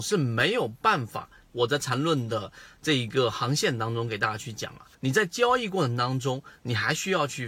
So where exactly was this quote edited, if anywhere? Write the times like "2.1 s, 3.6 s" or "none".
1.5 s, 4.9 s

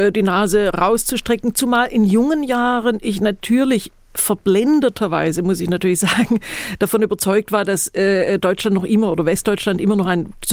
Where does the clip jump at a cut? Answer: none

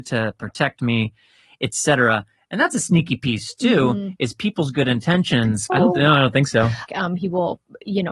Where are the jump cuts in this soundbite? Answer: 5.7 s, 6.9 s

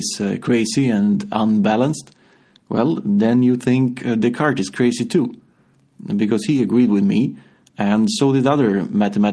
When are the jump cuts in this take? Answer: none

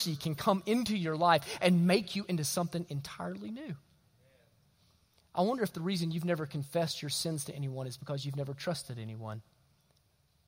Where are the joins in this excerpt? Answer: none

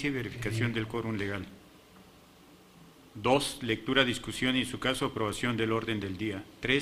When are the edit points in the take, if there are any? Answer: none

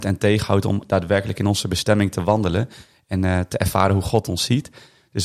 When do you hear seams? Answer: none

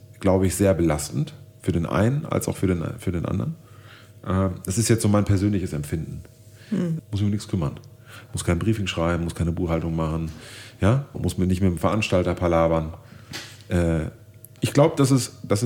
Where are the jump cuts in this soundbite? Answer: 7.0 s, 11.1 s, 14.6 s

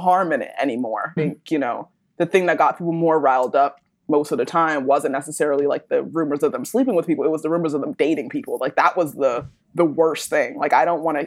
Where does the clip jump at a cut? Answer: 1.2 s

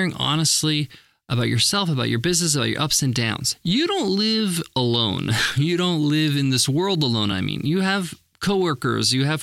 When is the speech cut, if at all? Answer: none

